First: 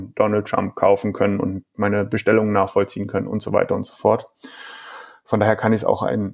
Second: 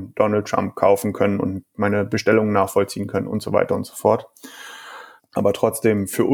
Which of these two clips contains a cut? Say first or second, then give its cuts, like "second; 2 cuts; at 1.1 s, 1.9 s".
second; 1 cut; at 5.2 s